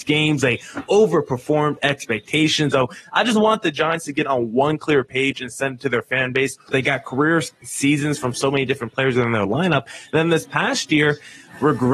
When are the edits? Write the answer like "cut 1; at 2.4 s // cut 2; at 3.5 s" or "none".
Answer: cut 1; at 2.7 s // cut 2; at 6.7 s